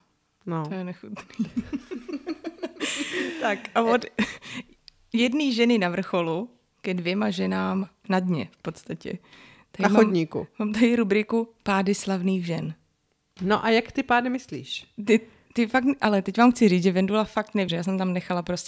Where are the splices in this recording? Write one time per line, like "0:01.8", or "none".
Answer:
0:17.7